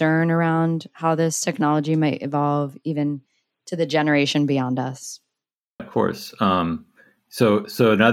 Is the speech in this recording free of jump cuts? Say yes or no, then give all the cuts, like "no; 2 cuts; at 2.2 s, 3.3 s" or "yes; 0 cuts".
no; 1 cut; at 5.8 s